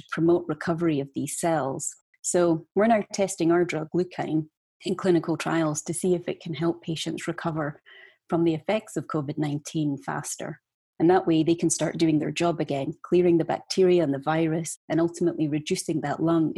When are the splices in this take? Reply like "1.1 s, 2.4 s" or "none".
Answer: 2.1 s, 10.8 s